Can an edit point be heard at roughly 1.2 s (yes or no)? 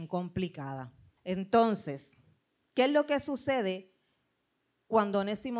yes